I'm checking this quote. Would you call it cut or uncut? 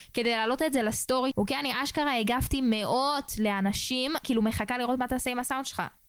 cut